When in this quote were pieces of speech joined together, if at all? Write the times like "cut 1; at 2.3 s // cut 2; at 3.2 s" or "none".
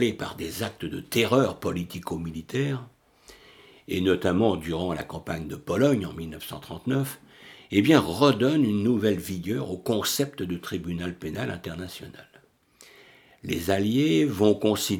none